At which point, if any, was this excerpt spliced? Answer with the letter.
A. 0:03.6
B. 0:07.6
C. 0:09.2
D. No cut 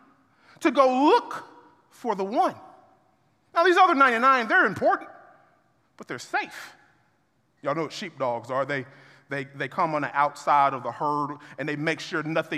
B